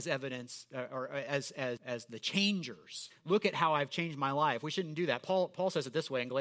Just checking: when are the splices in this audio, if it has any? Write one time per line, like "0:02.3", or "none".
0:01.8
0:03.1